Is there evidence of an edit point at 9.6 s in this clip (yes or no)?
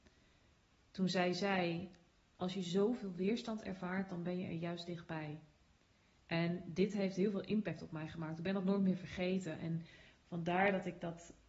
no